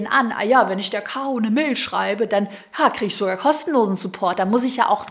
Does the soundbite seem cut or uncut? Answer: uncut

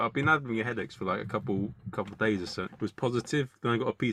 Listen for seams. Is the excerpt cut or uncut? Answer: cut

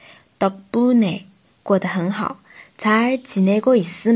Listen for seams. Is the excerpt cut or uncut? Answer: uncut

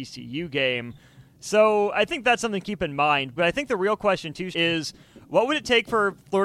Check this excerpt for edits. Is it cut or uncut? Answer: cut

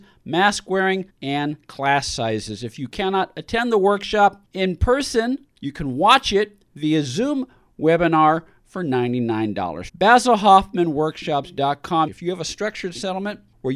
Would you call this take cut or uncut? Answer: cut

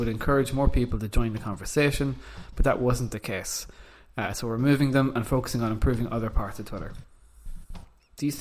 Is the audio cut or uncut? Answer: uncut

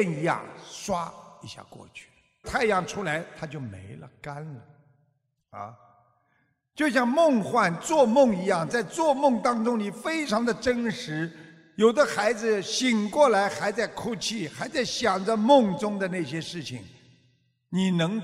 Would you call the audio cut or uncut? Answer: cut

